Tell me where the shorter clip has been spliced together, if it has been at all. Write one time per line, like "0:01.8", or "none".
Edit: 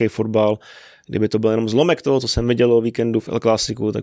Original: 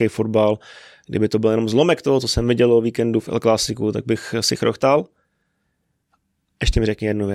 none